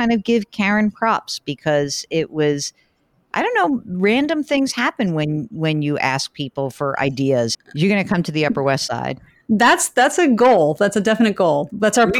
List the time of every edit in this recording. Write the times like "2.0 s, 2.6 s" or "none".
7.5 s